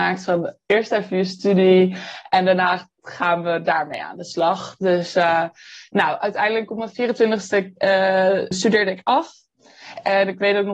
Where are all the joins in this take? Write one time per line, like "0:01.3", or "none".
0:08.5